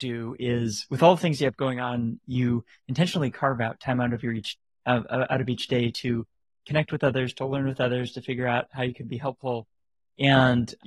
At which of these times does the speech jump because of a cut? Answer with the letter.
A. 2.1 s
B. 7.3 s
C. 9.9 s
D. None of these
D